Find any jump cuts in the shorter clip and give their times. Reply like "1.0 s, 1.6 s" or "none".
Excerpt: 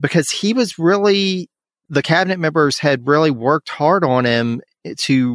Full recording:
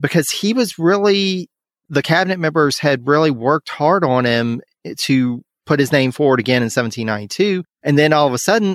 none